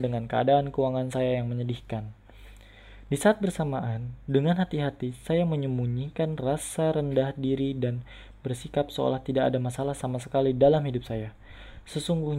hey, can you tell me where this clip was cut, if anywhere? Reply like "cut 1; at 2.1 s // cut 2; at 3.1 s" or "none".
none

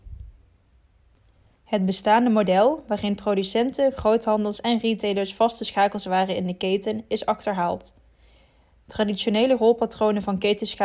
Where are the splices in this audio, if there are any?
cut 1; at 1.5 s

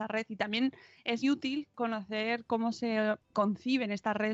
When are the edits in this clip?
cut 1; at 1.2 s // cut 2; at 3.3 s

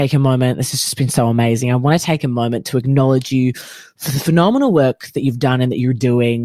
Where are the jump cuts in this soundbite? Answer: none

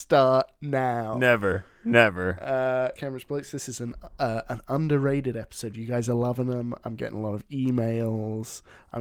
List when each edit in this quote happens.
cut 1; at 3.0 s

